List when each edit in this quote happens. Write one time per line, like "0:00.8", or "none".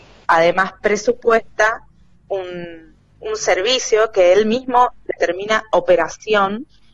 none